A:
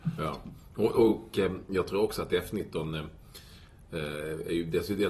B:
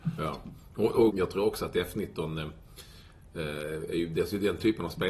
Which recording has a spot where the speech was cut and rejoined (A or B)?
B